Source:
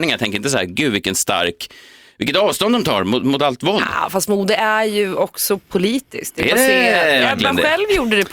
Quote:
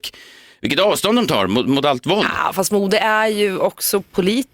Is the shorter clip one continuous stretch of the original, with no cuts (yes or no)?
yes